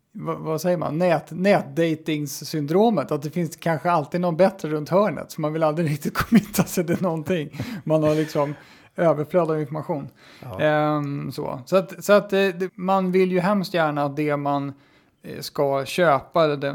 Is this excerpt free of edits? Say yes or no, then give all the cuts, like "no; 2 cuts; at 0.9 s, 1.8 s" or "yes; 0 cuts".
no; 1 cut; at 12.7 s